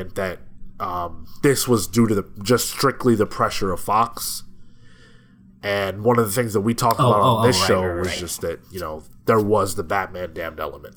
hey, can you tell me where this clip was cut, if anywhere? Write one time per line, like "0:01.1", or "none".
none